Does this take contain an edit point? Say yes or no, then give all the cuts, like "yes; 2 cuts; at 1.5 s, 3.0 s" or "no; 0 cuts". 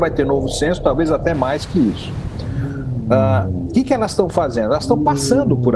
no; 0 cuts